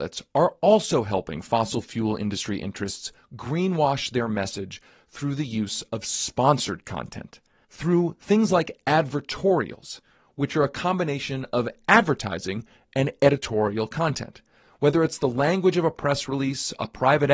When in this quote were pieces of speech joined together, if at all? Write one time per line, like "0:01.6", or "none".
0:14.7